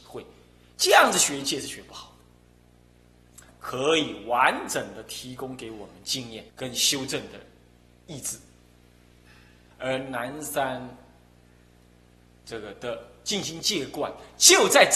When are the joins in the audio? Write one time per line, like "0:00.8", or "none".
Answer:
0:03.5
0:06.5
0:09.7